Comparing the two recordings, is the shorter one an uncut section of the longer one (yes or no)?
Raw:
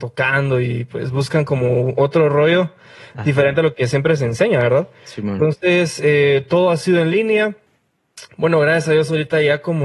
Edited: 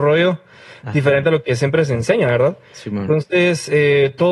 yes